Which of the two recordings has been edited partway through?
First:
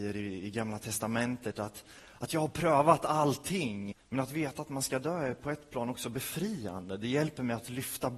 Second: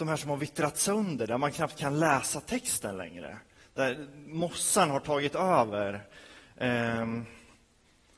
first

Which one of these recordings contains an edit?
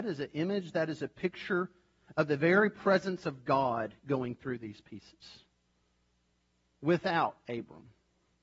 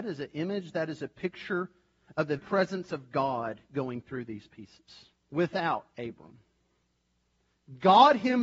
second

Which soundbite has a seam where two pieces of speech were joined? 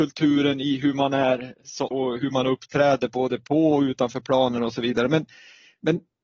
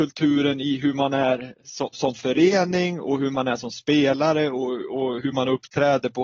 first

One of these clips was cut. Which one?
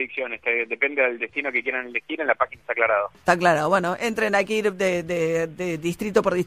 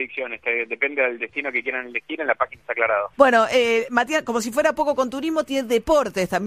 second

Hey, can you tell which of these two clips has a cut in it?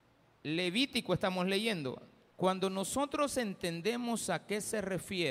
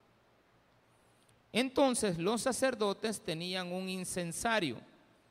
first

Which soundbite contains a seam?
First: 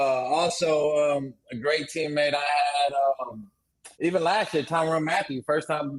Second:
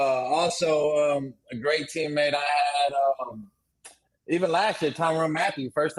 first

